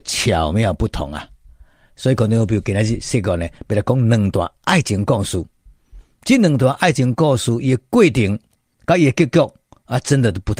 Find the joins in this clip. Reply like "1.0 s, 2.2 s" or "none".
none